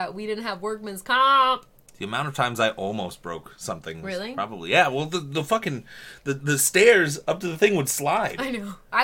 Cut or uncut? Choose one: uncut